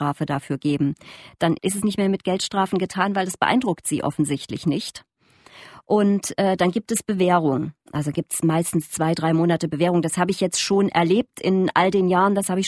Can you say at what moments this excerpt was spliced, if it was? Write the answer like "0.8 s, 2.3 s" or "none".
none